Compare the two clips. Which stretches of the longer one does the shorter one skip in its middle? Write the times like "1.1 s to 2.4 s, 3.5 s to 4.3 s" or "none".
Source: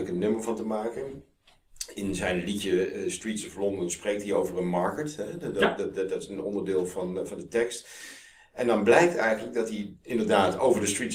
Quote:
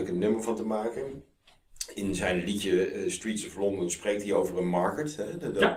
none